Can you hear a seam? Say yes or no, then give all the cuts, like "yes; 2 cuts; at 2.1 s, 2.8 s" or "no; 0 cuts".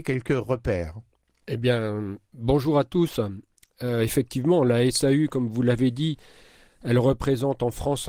no; 0 cuts